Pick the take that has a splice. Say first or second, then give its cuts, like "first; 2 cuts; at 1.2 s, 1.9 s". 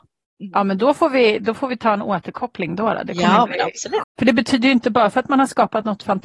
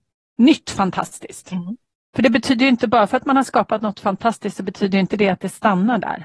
first; 1 cut; at 4.0 s